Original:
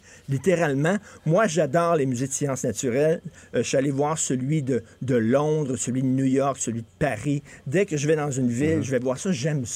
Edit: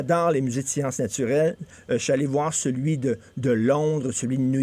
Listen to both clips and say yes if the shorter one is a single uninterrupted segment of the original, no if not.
yes